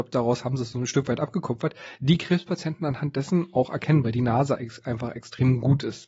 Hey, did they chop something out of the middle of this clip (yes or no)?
no